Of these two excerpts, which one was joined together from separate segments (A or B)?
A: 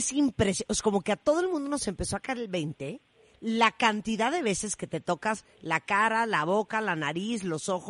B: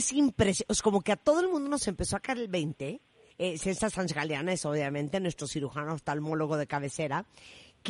B